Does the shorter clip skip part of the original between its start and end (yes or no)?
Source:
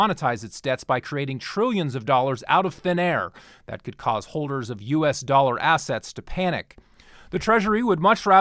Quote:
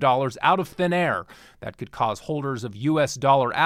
no